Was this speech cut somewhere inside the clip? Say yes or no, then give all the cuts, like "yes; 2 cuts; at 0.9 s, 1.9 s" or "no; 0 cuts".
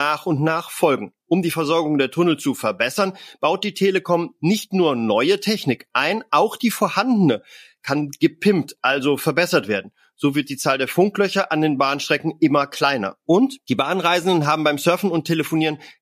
no; 0 cuts